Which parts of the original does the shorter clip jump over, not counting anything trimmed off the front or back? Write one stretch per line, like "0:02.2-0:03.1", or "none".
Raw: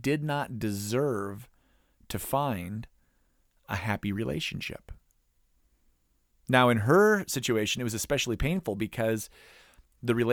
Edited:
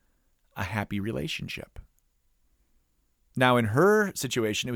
none